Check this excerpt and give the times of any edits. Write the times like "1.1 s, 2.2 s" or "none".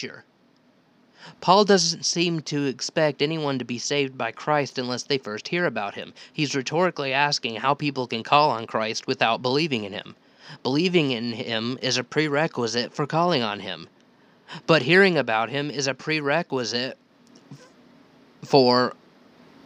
none